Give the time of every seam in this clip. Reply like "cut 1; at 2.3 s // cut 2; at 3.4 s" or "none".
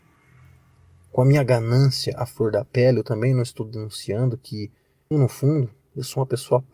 cut 1; at 5.1 s